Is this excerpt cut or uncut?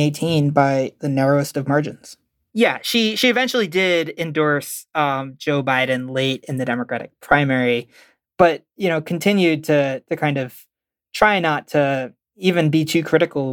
cut